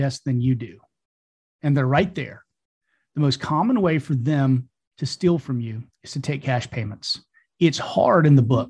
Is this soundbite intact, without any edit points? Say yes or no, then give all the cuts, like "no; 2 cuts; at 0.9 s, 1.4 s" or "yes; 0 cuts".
yes; 0 cuts